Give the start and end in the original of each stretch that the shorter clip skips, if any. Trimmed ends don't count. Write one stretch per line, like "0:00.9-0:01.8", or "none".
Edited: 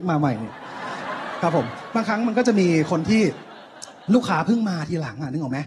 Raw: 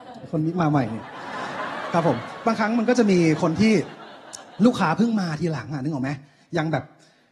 none